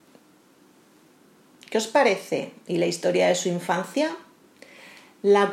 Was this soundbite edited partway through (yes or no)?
no